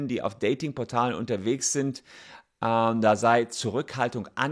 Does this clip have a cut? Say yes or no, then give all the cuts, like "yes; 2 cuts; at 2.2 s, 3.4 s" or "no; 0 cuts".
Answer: no; 0 cuts